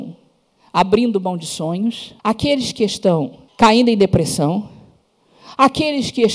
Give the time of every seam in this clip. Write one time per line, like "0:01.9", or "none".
0:02.2
0:03.5